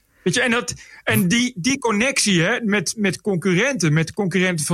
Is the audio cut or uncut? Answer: uncut